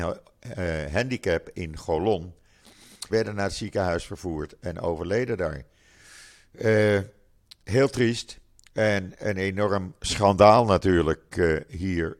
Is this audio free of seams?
no; 1 cut; at 3.1 s

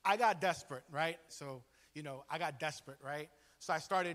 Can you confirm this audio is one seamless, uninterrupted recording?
no; 1 cut; at 1.3 s

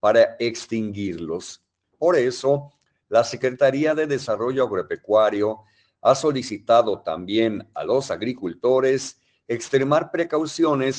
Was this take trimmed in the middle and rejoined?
yes; 1 cut; at 1.8 s

